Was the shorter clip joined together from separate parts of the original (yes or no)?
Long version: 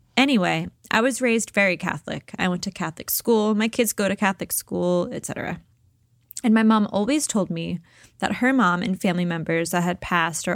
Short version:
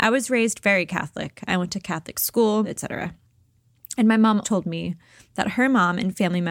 yes